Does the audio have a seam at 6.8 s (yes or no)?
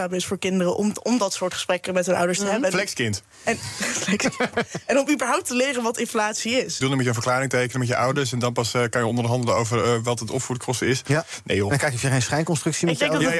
yes